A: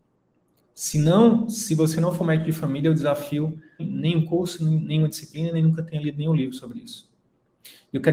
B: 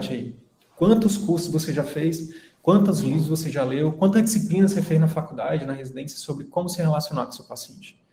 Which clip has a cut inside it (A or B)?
A